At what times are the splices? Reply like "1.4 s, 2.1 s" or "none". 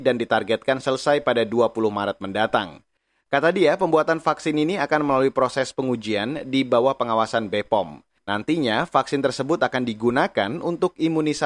none